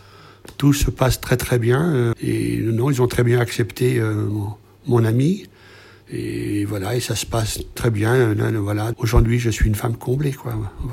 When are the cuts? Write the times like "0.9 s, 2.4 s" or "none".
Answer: 2.1 s, 7.8 s, 8.9 s

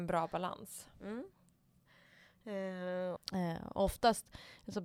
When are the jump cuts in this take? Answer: 3.2 s

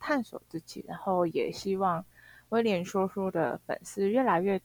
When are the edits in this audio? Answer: none

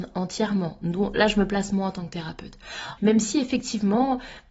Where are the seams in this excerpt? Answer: 3.0 s

